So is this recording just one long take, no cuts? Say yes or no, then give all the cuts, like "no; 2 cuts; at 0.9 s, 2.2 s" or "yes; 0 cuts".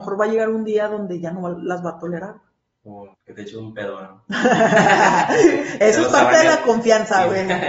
no; 1 cut; at 3.1 s